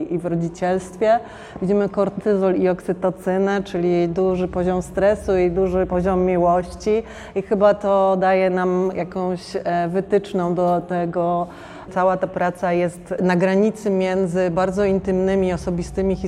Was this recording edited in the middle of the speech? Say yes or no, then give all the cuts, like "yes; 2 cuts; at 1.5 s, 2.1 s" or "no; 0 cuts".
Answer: yes; 1 cut; at 11.9 s